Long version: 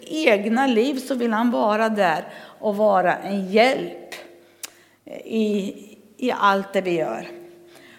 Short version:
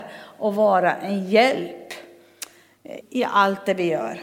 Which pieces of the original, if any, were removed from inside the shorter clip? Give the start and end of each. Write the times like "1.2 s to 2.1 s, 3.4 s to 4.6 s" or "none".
5.2 s to 6.1 s